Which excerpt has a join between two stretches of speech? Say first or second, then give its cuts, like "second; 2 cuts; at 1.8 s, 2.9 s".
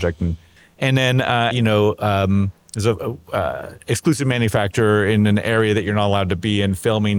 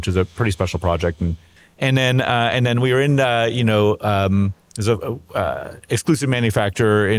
first; 1 cut; at 1.5 s